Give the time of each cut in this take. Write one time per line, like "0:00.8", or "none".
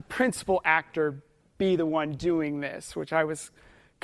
none